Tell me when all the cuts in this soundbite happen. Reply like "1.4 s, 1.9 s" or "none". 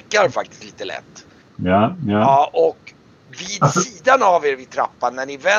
1.5 s